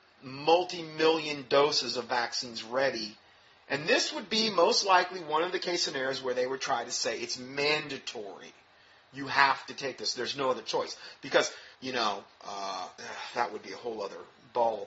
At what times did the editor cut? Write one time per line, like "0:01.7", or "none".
0:11.7
0:13.0